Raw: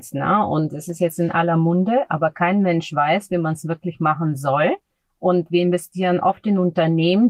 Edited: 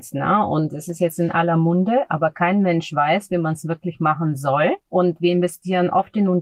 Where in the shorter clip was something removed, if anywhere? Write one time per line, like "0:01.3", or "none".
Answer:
0:04.8

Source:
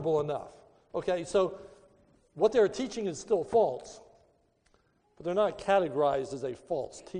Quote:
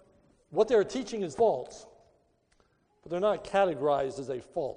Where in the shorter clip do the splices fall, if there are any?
0:01.3

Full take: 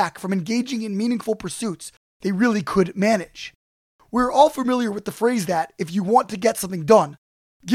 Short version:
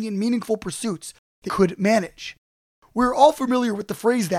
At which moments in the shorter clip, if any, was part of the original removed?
0:01.5

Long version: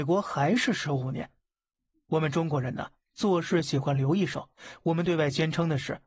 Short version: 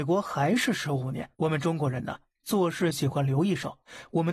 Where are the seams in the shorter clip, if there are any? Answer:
0:01.3

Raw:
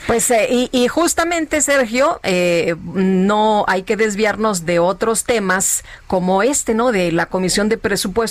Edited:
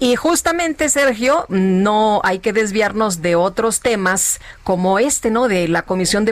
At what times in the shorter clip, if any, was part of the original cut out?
0:01.5

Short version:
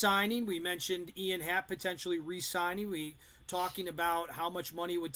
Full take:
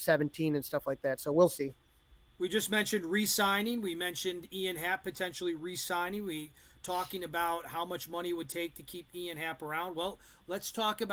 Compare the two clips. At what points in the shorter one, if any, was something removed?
none

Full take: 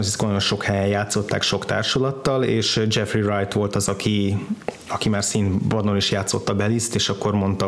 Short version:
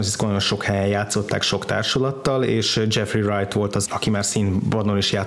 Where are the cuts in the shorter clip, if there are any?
0:03.9

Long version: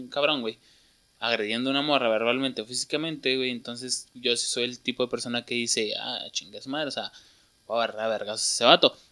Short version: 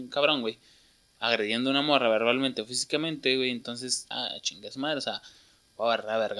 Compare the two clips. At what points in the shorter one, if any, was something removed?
0:04.1

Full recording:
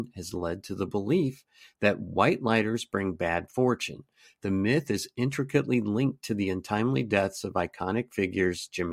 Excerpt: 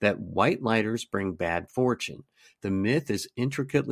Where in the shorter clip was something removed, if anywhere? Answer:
none

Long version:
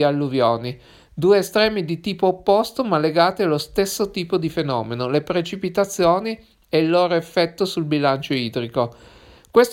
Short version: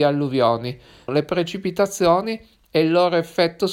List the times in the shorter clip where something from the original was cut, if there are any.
0:01.1

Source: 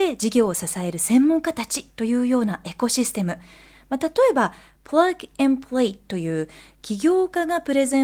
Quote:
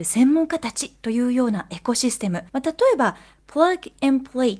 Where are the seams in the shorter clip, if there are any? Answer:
0:02.5

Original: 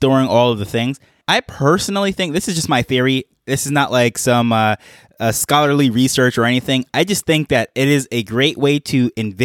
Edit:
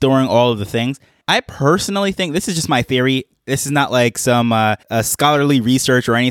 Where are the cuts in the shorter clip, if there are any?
0:04.8

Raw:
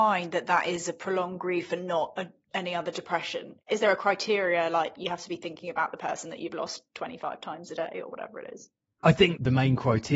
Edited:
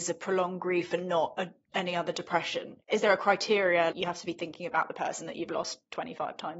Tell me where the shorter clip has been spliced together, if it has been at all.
0:03.9

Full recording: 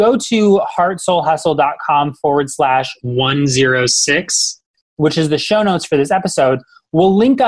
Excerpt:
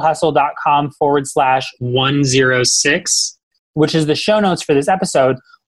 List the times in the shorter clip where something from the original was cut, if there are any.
none

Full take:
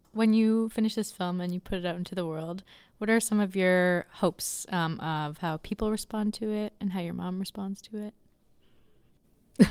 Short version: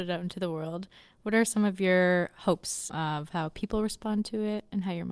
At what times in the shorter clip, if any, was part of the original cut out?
0:02.9

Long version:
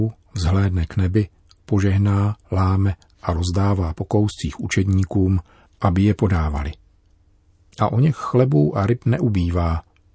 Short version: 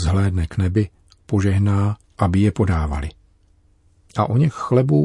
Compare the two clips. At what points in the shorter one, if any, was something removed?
0:02.0

